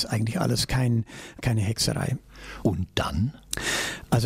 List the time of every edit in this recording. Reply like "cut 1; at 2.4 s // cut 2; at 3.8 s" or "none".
cut 1; at 1.4 s // cut 2; at 2.6 s